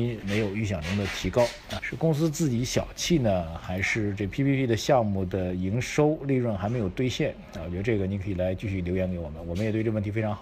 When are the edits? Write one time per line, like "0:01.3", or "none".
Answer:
0:01.8